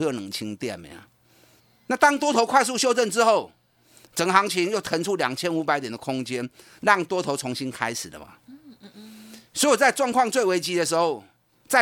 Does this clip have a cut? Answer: no; 0 cuts

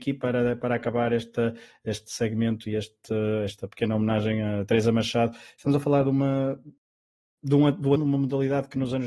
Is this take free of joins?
no; 1 cut; at 8.0 s

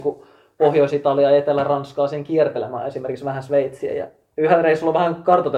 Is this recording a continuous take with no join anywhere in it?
yes; 0 cuts

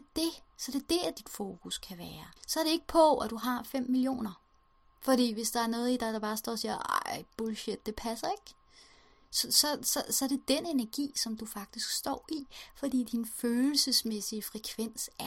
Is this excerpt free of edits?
no; 1 cut; at 2.4 s

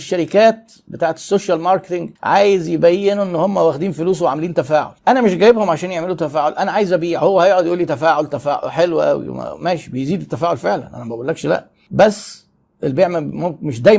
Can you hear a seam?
yes; 2 cuts; at 2.2 s, 5.0 s

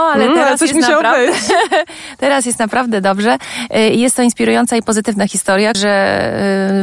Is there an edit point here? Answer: yes; 1 cut; at 5.7 s

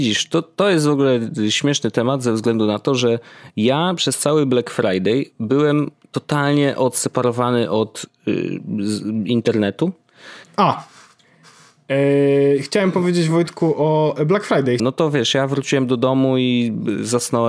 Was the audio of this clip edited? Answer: yes; 2 cuts; at 10.4 s, 14.8 s

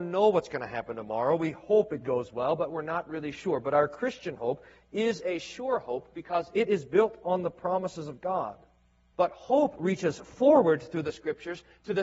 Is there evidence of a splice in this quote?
yes; 1 cut; at 9.1 s

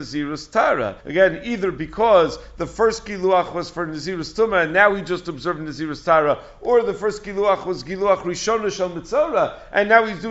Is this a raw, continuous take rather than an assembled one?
no; 1 cut; at 1.0 s

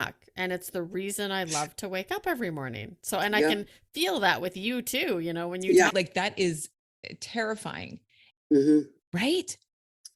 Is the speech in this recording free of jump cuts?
no; 2 cuts; at 5.9 s, 8.3 s

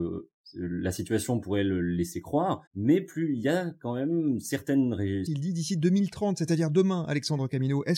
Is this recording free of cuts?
no; 2 cuts; at 2.7 s, 5.3 s

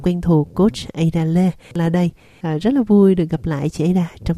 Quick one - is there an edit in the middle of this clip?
yes; 1 cut; at 1.8 s

